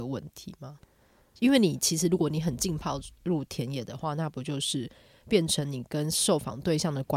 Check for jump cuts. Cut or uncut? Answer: uncut